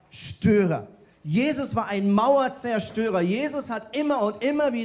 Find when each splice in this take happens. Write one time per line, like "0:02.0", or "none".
none

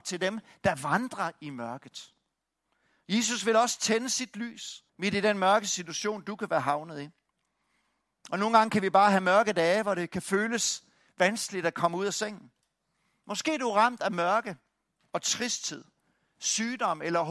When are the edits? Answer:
0:04.9

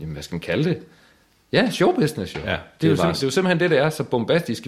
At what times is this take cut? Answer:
none

